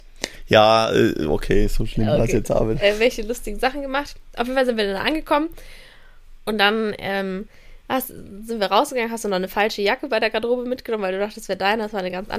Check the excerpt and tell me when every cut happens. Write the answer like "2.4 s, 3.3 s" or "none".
6.4 s